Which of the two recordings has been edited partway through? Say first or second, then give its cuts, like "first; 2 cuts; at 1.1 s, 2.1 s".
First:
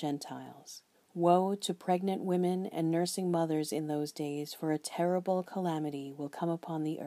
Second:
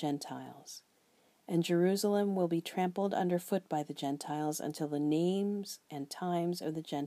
first; 1 cut; at 0.9 s